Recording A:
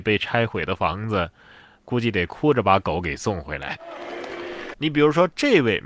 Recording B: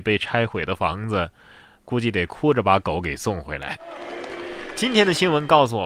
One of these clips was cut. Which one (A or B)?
A